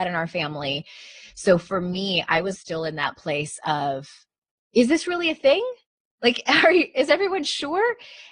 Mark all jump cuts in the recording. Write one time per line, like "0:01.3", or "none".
0:02.5